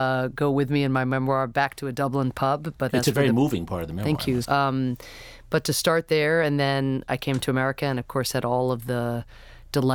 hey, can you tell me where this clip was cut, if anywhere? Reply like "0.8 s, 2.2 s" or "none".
4.4 s